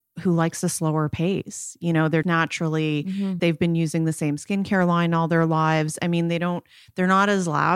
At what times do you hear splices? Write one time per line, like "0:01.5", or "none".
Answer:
0:02.2
0:03.4